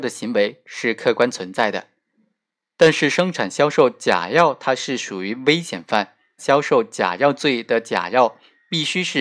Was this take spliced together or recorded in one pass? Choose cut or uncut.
cut